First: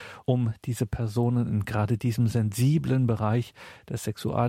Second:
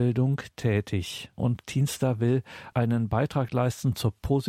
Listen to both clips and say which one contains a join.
second; 1 cut; at 1.4 s

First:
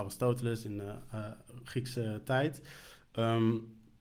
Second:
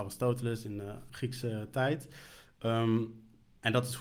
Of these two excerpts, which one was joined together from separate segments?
second; 1 cut; at 1.1 s

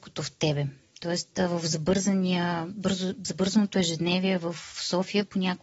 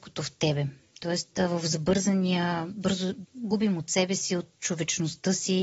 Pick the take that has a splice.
second; 1 cut; at 3.2 s

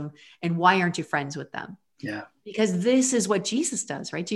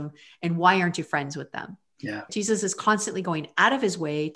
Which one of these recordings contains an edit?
second; 1 cut; at 2.3 s

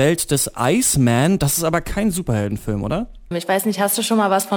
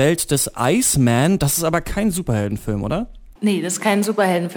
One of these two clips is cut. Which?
first; 1 cut; at 3.3 s

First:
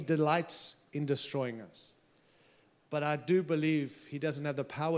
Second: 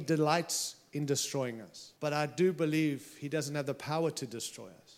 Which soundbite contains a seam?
second; 1 cut; at 2.0 s

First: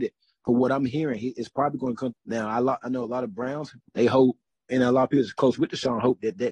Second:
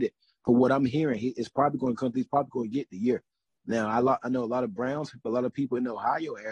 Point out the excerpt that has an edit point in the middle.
first; 2 cuts; at 2.1 s, 3.8 s

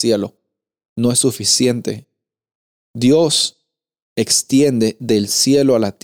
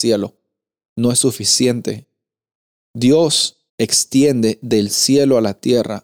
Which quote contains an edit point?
second; 1 cut; at 3.7 s

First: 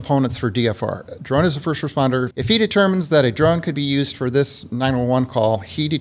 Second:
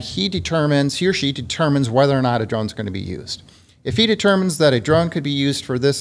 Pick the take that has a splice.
first; 1 cut; at 2.3 s

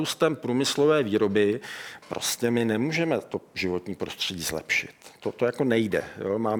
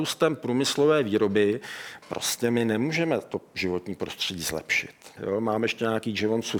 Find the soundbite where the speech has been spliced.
second; 1 cut; at 5.2 s

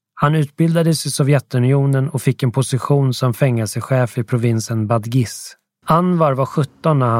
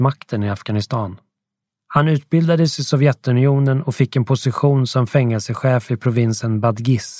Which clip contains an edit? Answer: first; 1 cut; at 5.8 s

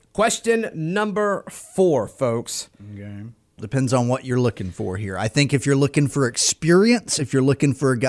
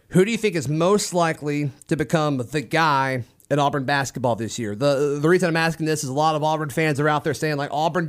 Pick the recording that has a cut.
first; 1 cut; at 3.6 s

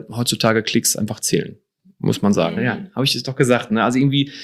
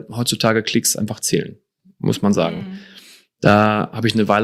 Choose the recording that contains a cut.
first; 1 cut; at 2.6 s

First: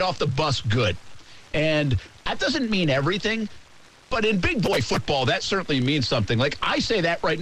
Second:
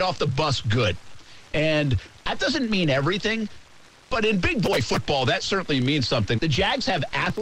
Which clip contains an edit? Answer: second; 1 cut; at 6.4 s

